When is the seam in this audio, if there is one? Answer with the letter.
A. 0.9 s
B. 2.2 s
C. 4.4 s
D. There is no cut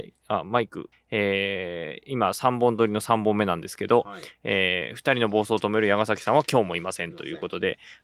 A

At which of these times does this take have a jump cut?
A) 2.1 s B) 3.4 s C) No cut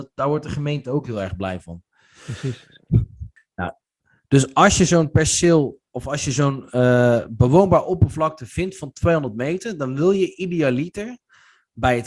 B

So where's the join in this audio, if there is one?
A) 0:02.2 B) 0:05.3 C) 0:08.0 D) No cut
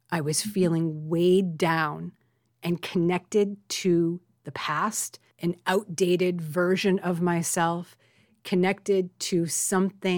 B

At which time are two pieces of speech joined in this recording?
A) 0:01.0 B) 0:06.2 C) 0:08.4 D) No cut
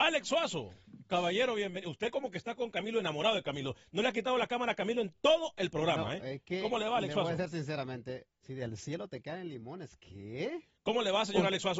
C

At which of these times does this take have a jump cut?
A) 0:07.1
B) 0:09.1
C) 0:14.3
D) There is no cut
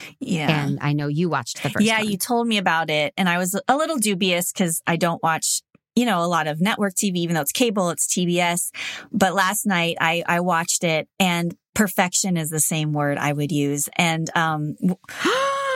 D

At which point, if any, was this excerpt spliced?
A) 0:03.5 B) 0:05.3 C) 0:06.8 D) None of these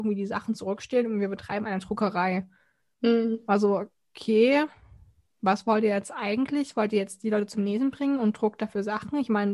D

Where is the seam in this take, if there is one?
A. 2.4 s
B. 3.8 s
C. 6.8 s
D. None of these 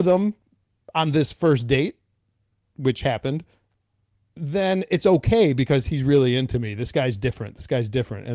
D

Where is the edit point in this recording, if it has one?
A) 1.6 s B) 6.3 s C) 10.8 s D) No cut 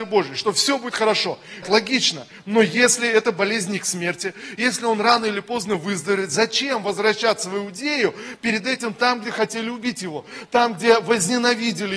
A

